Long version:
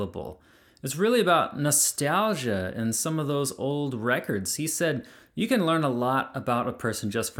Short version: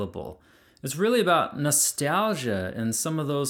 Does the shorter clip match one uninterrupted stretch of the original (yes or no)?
yes